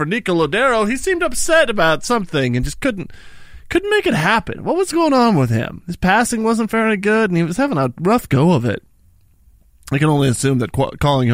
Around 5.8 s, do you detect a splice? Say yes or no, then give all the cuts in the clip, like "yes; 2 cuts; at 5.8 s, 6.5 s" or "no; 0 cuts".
no; 0 cuts